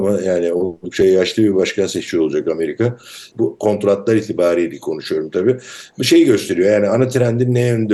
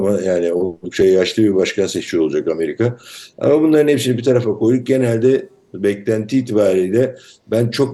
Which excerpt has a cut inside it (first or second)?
first